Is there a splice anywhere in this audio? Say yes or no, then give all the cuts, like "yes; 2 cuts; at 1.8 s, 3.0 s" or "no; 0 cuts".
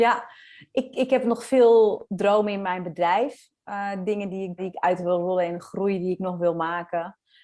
yes; 1 cut; at 4.6 s